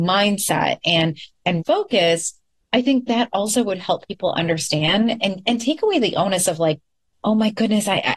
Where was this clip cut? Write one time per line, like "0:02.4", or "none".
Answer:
0:01.6